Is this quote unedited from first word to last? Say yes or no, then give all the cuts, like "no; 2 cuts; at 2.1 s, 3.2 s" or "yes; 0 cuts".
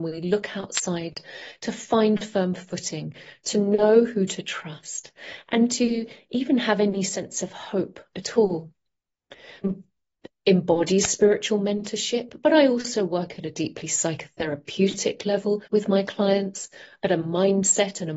no; 2 cuts; at 9.6 s, 15.7 s